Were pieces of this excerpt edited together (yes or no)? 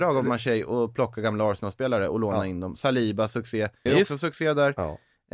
yes